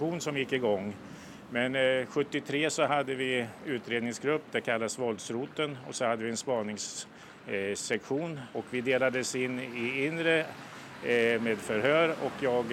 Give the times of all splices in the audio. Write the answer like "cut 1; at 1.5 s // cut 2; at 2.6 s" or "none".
none